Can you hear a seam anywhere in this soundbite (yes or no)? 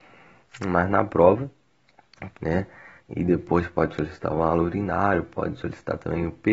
yes